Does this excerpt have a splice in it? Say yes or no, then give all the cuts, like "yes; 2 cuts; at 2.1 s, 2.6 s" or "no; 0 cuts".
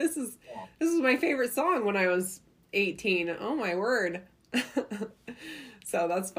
no; 0 cuts